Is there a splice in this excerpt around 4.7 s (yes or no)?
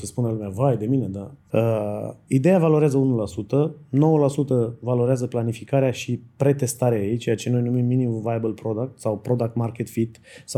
no